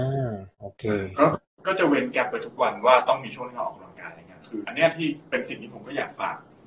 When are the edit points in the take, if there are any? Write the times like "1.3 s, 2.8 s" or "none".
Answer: 4.6 s